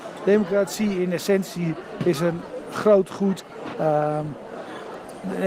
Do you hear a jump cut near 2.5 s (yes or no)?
no